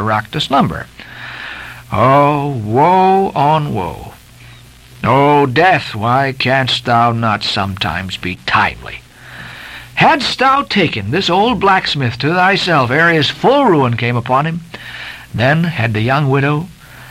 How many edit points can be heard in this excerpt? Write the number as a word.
zero